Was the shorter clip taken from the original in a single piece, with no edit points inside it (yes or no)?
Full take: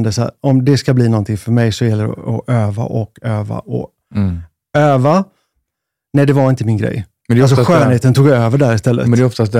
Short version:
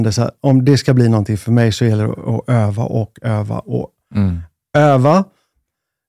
yes